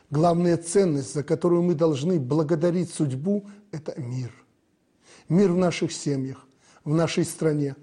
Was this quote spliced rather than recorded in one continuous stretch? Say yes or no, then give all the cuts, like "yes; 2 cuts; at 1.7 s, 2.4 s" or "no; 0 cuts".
no; 0 cuts